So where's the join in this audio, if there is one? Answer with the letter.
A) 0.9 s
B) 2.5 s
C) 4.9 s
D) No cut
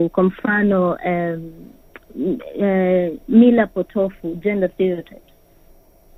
D